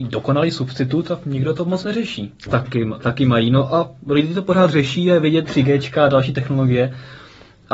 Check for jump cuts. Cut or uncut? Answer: cut